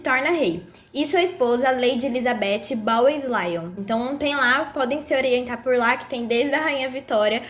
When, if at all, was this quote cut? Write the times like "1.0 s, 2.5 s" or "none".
3.8 s

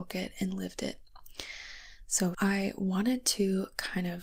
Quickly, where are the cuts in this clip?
2.3 s

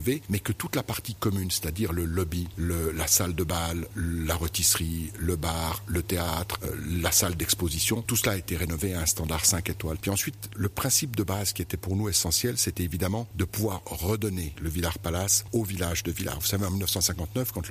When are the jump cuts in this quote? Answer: 10.0 s

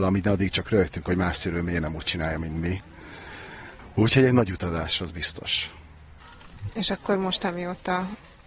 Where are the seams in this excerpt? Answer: none

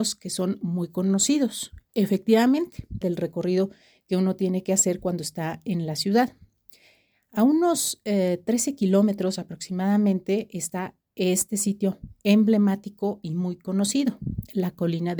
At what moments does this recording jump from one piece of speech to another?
3.0 s

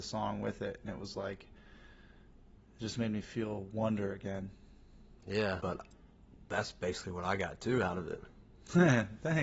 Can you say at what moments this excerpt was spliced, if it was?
5.6 s

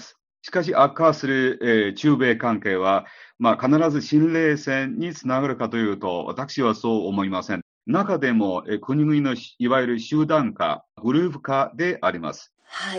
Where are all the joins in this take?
7.8 s

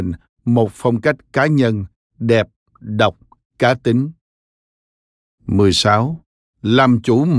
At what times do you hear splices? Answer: none

